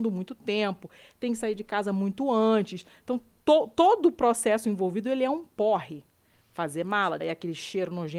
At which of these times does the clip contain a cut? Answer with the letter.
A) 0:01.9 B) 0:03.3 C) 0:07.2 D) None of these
C